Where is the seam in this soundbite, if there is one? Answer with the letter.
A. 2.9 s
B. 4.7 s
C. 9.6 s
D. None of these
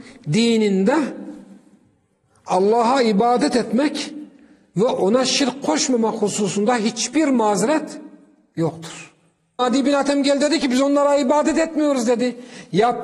C